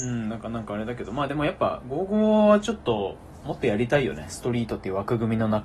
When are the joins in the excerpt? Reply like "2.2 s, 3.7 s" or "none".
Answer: none